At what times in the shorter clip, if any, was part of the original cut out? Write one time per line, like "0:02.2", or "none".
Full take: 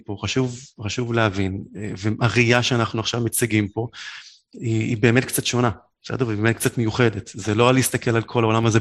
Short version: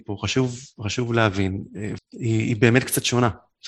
0:02.0